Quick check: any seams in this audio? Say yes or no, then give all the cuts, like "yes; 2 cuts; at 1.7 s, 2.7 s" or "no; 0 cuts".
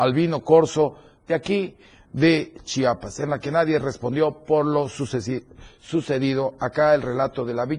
no; 0 cuts